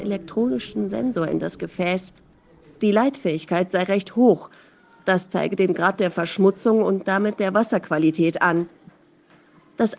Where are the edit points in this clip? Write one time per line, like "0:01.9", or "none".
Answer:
none